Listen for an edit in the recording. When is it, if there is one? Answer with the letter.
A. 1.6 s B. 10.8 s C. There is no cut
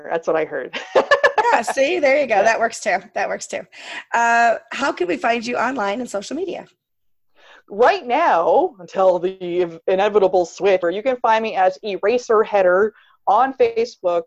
B